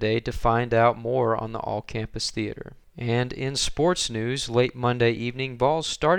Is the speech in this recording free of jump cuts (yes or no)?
yes